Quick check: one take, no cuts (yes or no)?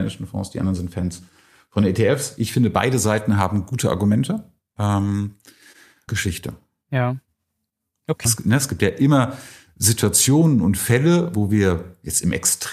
no